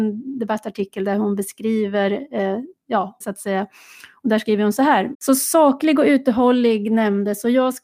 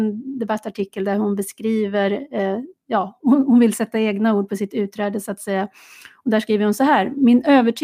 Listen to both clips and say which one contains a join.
first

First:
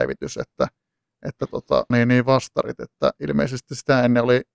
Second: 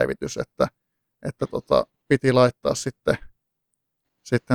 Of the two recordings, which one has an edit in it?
first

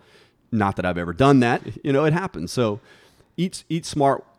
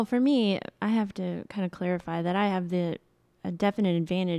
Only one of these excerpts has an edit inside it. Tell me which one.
first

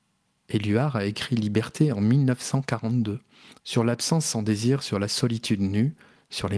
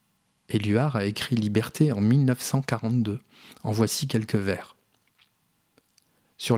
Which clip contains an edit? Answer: first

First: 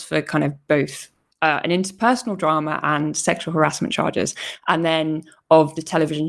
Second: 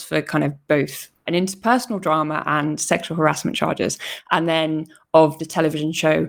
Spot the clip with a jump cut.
second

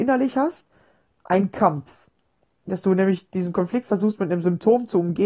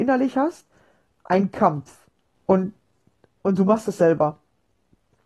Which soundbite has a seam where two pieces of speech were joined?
second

